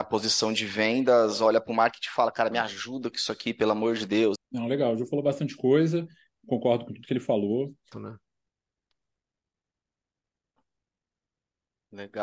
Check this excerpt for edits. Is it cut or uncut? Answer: cut